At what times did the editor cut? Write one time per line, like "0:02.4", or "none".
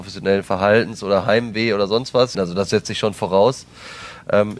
0:02.3